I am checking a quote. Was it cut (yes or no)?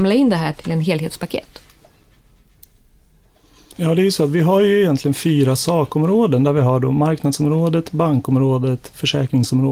yes